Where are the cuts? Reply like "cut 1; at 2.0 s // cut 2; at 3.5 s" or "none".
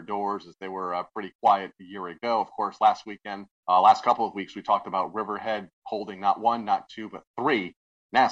cut 1; at 3.5 s